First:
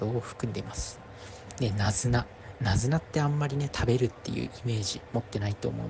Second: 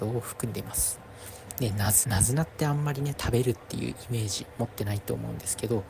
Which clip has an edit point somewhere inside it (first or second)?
second